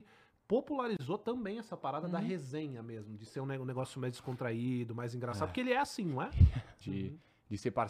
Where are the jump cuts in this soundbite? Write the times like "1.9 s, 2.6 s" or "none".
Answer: 6.8 s